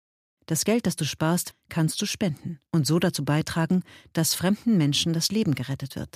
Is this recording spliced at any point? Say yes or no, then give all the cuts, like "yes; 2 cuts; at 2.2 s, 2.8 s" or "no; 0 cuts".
yes; 2 cuts; at 1.5 s, 2.7 s